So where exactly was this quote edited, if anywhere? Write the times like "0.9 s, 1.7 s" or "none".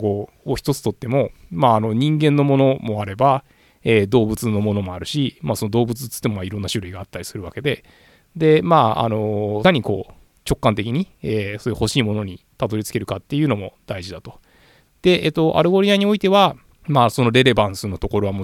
14.9 s